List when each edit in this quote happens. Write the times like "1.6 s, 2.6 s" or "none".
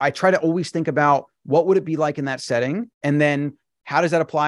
2.9 s